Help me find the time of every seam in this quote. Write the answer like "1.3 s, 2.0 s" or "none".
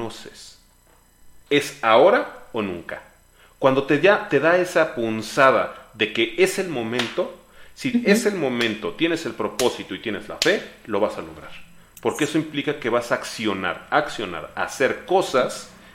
1.5 s